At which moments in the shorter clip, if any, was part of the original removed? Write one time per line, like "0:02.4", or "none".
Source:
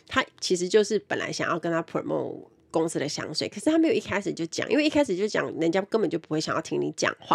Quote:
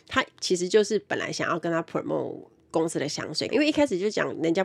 0:03.5